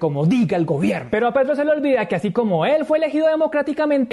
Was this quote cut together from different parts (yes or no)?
no